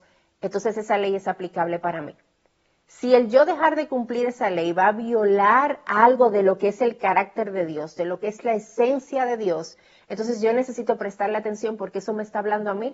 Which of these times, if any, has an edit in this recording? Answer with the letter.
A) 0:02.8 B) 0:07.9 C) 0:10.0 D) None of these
D